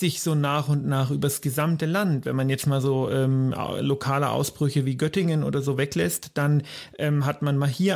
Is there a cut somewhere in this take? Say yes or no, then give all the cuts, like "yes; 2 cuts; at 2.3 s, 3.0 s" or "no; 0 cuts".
no; 0 cuts